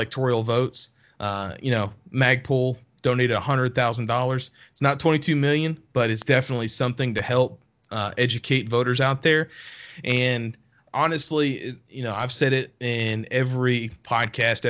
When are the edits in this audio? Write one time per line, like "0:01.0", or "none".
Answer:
none